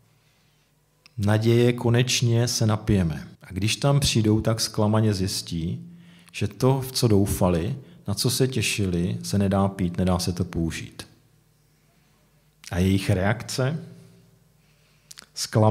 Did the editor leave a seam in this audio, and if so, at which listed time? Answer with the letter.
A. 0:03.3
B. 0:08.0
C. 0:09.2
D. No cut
A